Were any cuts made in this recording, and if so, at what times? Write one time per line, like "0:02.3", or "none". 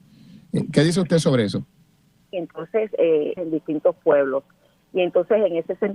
0:02.3
0:03.4
0:04.8